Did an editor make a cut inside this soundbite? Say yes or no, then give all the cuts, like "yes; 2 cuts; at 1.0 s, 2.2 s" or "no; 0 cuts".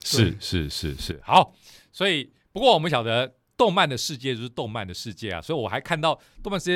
no; 0 cuts